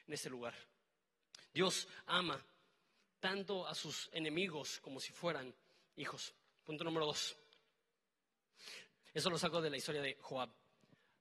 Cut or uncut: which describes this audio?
cut